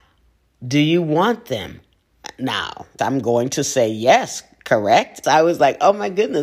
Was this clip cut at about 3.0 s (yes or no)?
yes